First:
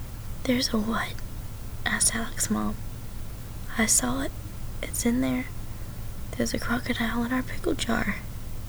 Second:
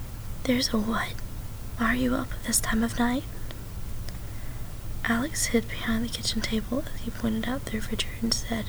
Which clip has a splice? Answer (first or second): second